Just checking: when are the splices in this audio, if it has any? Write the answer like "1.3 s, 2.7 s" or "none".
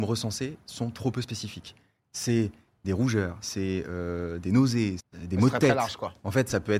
3.4 s, 5.0 s